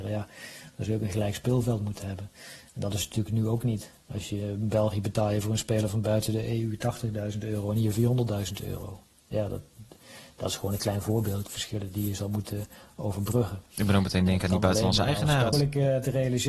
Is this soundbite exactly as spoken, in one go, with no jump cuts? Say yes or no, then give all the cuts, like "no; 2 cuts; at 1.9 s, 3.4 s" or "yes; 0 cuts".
no; 2 cuts; at 11.5 s, 15.5 s